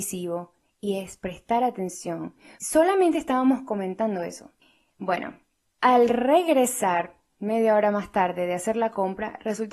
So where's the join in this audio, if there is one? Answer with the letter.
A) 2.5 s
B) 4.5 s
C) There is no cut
A